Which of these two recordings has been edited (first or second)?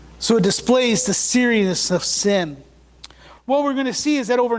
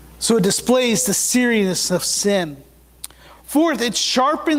first